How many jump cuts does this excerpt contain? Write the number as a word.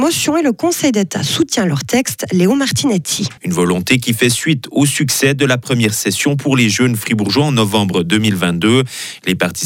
one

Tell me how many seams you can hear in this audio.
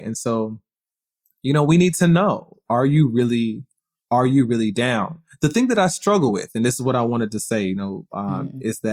one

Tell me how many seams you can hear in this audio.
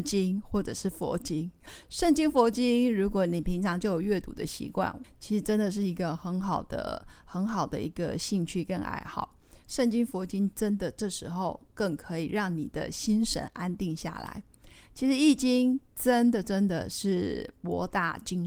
two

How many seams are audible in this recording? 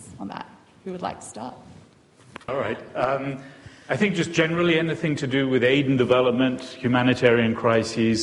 one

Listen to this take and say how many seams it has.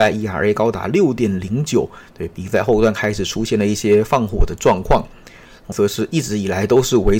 one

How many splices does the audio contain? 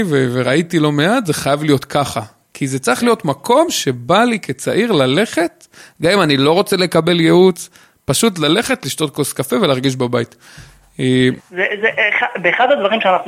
one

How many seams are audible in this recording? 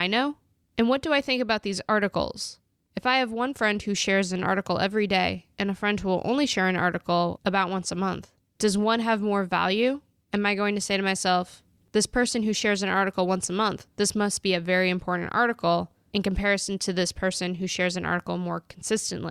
one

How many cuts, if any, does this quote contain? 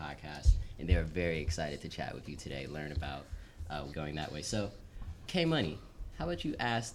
two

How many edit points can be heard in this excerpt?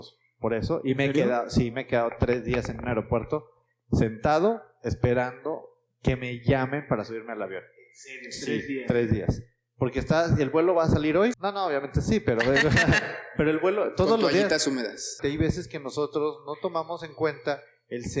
two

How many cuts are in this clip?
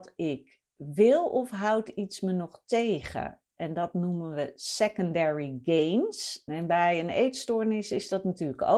one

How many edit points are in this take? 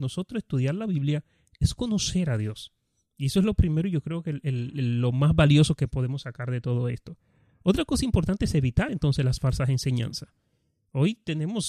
zero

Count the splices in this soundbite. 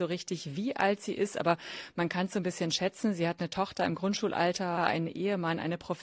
one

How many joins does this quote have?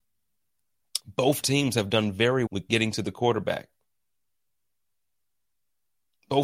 two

